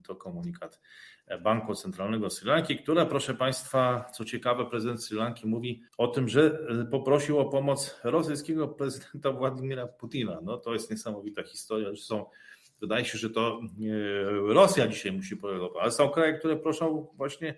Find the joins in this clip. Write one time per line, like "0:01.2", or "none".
0:05.9